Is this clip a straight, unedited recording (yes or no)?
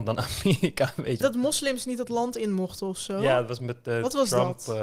no